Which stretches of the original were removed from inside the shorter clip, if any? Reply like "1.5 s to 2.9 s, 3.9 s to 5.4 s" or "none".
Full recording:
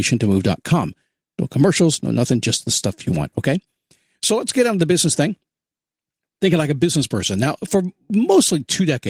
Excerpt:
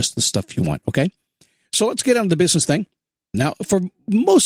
5.8 s to 7.4 s